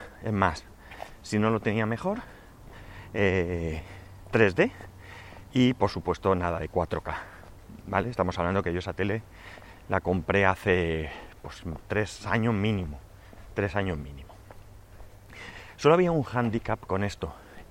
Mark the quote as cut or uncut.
uncut